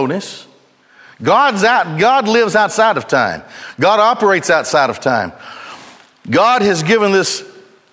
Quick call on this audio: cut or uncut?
uncut